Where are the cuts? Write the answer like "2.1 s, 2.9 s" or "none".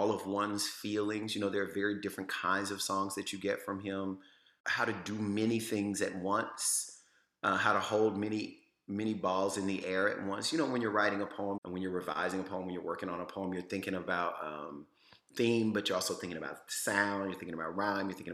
none